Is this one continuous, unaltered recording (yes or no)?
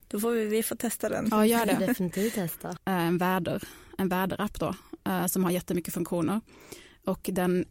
no